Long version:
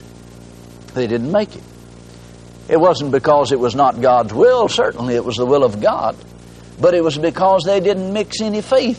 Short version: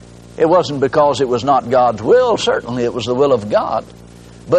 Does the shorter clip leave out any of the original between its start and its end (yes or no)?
no